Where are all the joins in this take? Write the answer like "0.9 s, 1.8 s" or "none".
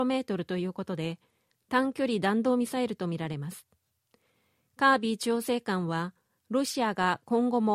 none